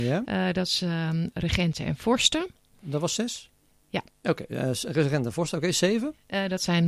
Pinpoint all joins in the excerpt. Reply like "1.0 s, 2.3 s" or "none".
1.3 s